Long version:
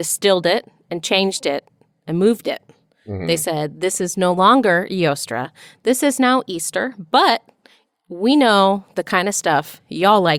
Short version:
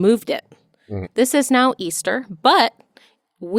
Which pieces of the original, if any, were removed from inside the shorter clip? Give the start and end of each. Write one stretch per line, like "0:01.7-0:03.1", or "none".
0:03.2-0:05.7